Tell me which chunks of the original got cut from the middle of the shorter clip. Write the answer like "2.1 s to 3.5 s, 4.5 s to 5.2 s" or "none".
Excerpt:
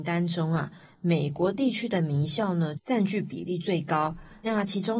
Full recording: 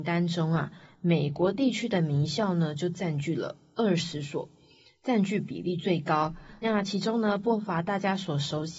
2.8 s to 4.9 s